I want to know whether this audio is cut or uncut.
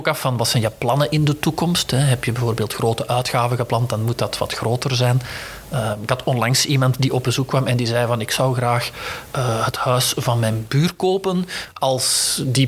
uncut